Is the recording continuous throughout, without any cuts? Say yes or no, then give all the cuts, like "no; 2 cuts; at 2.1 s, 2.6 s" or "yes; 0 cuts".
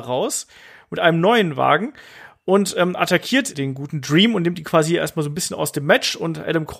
yes; 0 cuts